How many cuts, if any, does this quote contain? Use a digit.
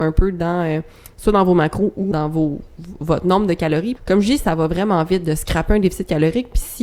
2